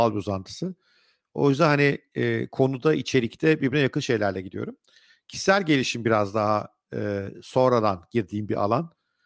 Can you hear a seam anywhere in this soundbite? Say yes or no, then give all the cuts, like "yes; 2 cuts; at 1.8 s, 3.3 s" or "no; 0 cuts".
no; 0 cuts